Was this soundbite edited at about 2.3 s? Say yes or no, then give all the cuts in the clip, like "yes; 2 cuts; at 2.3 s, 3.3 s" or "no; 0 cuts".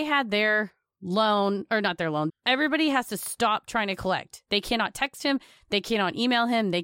yes; 1 cut; at 2.3 s